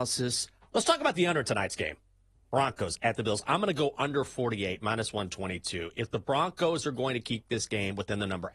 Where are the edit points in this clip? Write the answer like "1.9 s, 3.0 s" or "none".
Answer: none